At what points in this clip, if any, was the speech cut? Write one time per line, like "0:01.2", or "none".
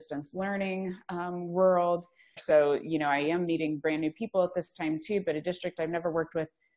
0:02.4